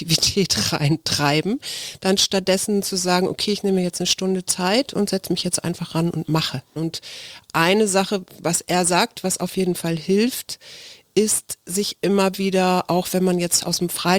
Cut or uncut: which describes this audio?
cut